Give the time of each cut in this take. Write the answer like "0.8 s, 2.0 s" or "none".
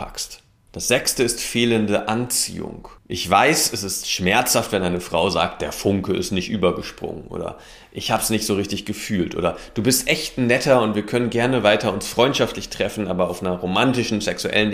3.0 s